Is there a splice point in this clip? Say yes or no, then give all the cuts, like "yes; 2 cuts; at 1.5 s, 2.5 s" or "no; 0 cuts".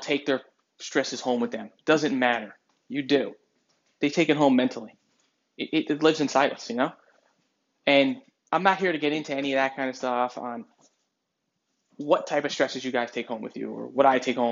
no; 0 cuts